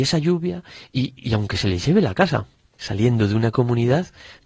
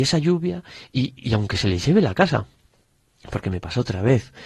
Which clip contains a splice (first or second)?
first